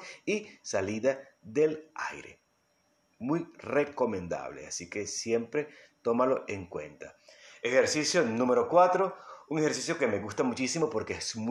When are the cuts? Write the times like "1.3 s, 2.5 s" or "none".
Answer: none